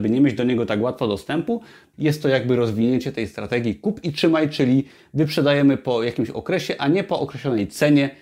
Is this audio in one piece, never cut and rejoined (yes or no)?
no